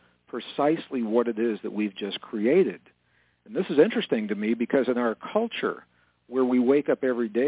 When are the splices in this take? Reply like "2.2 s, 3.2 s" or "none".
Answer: none